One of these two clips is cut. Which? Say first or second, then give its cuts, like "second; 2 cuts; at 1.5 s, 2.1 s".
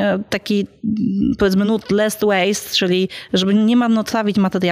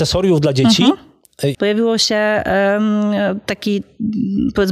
second; 1 cut; at 1.5 s